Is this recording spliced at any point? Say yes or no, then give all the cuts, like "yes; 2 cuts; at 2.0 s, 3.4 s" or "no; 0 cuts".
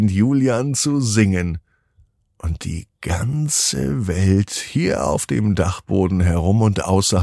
no; 0 cuts